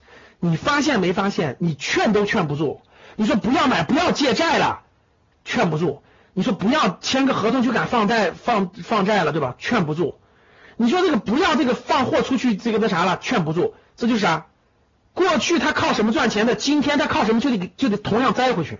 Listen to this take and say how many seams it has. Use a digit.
0